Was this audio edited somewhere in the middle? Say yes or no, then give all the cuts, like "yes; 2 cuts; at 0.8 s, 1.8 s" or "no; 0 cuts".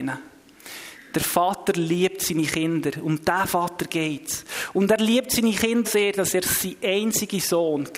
yes; 1 cut; at 5.8 s